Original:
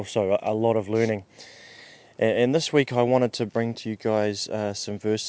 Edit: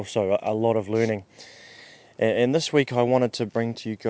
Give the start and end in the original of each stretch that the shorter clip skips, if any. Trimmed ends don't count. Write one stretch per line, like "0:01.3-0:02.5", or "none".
none